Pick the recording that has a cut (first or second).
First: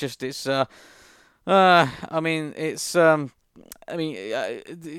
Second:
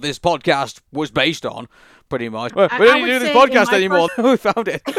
second